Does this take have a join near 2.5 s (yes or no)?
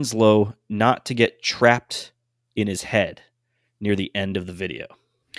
no